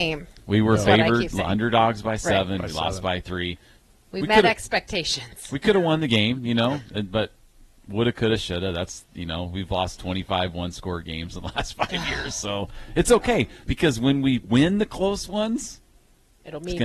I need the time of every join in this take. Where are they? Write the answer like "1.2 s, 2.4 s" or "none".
none